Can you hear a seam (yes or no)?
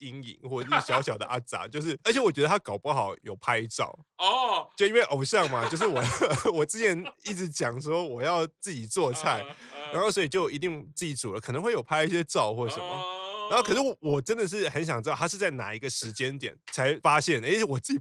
no